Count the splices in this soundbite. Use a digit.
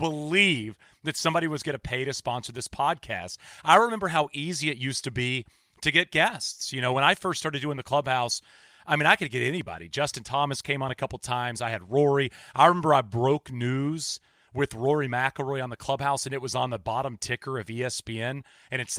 0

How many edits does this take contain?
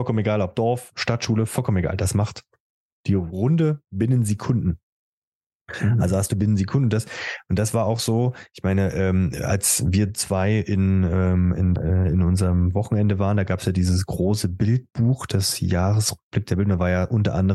1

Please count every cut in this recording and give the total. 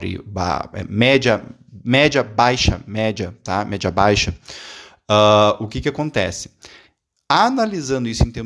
0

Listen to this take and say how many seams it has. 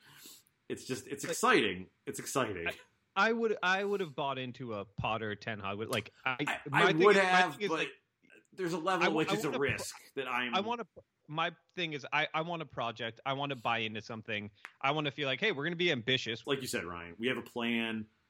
2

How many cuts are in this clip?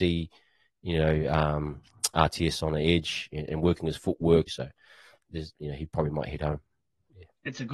2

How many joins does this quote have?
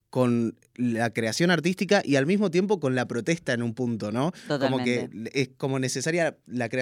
0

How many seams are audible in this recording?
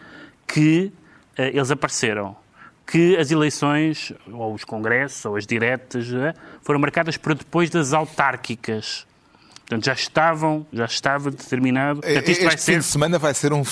1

